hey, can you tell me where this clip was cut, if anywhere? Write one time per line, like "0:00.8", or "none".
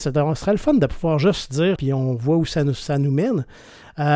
0:01.8